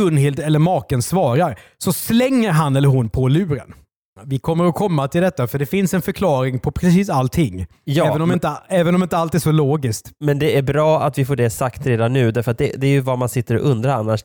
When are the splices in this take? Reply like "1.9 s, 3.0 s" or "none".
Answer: 4.2 s